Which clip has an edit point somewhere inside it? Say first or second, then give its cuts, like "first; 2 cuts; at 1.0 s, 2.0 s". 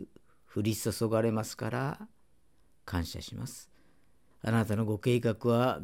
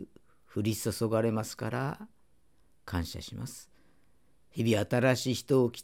first; 1 cut; at 4.3 s